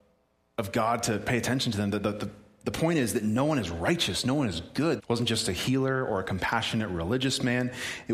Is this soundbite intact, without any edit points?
no; 1 cut; at 5.0 s

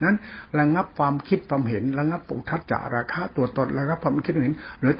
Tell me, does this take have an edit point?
yes; 1 cut; at 2.6 s

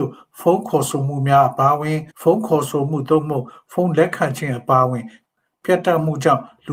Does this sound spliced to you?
yes; 1 cut; at 2.1 s

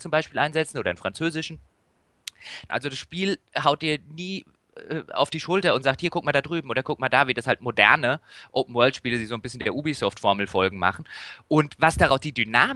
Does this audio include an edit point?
yes; 1 cut; at 2.7 s

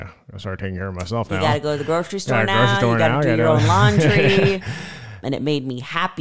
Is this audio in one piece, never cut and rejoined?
no; 1 cut; at 5.2 s

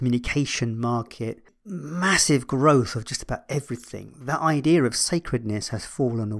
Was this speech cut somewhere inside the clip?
no; 0 cuts

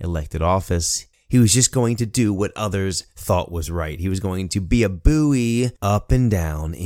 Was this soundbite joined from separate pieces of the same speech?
yes; 1 cut; at 1.1 s

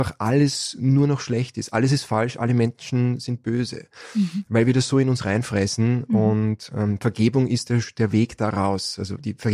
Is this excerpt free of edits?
yes; 0 cuts

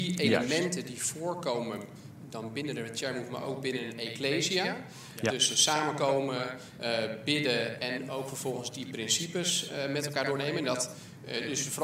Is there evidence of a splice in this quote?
no; 0 cuts

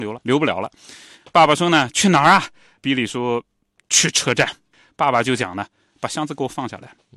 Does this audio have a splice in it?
no; 0 cuts

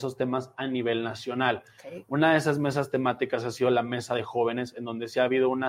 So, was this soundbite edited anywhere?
no; 0 cuts

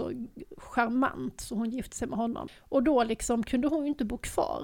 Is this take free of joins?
no; 1 cut; at 2.5 s

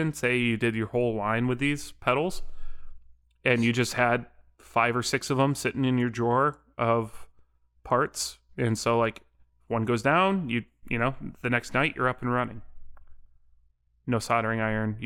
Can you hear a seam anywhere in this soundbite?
no; 0 cuts

